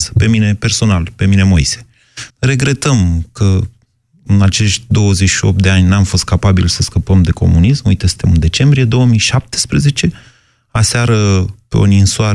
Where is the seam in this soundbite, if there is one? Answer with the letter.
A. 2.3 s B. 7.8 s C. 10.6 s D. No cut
A